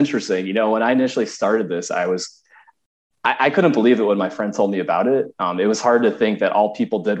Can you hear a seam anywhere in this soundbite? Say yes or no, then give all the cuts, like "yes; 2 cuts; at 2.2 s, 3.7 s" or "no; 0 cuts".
no; 0 cuts